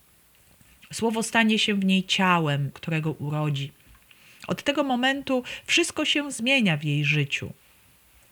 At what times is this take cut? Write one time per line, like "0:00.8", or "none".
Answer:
0:02.7